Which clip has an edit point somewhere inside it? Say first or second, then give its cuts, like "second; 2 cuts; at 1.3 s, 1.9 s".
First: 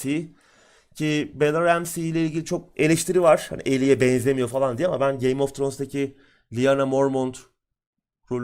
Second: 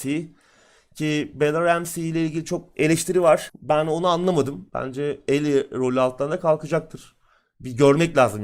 second; 2 cuts; at 3.5 s, 4.7 s